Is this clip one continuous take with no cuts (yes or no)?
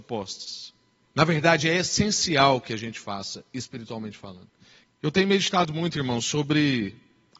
no